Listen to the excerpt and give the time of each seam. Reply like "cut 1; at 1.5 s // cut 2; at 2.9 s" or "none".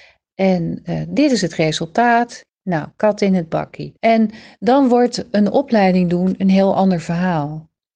cut 1; at 2.5 s // cut 2; at 4.0 s